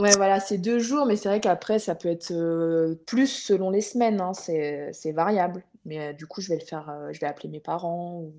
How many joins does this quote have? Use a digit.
1